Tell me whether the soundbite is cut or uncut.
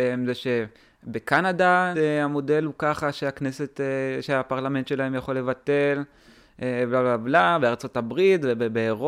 cut